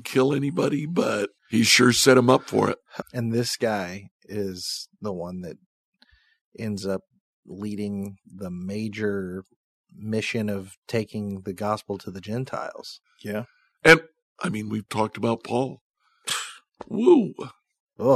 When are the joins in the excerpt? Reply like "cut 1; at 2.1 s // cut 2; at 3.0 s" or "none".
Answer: cut 1; at 1.4 s // cut 2; at 3.0 s // cut 3; at 13.0 s